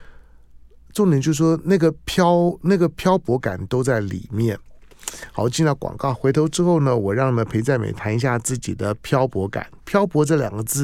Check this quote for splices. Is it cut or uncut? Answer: uncut